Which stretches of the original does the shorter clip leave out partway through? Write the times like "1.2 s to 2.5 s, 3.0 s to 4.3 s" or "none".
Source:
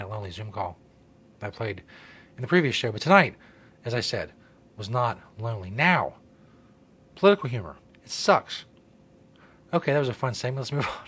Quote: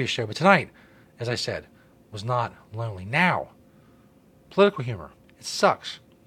none